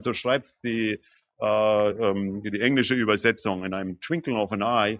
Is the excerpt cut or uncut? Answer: uncut